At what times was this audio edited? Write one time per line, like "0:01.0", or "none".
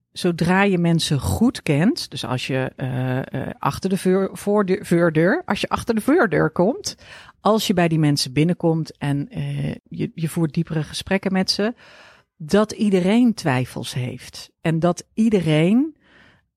0:09.8